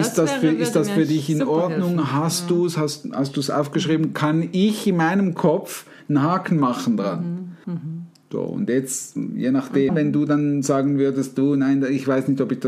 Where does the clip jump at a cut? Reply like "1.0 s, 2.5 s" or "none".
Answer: 7.6 s, 9.9 s